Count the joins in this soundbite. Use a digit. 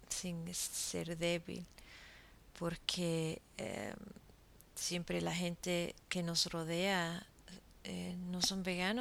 1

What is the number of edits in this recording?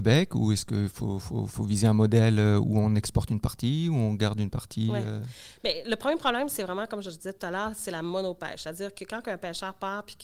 0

